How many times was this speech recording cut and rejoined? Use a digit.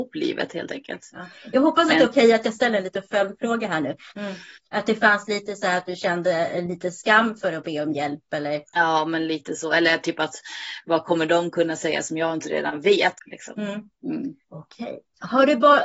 3